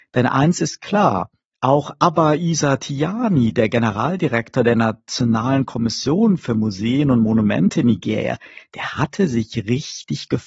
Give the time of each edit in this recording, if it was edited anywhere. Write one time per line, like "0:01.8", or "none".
none

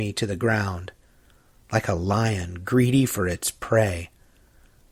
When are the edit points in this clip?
none

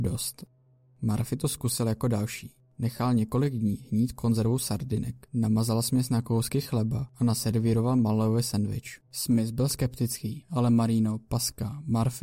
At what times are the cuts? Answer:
0:05.3
0:09.1

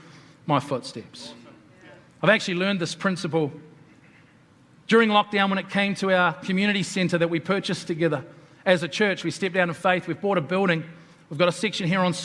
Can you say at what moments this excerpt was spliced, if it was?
none

